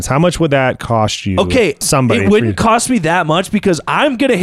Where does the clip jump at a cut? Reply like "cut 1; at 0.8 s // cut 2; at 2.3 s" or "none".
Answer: cut 1; at 1.8 s